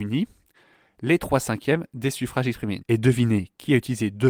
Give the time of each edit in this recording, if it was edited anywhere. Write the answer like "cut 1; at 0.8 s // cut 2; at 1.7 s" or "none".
cut 1; at 2.8 s